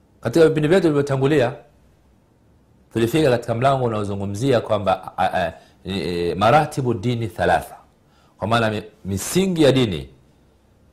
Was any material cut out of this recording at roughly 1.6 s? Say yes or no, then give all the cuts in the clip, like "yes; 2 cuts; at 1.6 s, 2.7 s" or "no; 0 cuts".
no; 0 cuts